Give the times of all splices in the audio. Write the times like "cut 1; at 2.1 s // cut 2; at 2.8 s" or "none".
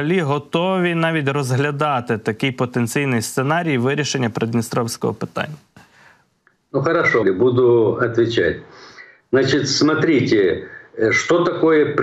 cut 1; at 7.2 s